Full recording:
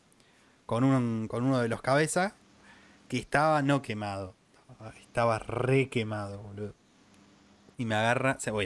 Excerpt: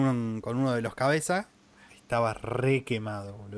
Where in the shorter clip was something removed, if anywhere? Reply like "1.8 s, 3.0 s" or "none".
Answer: 1.9 s